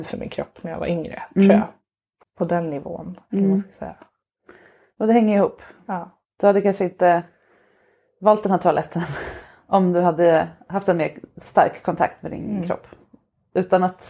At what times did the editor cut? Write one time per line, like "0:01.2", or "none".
0:02.2
0:09.4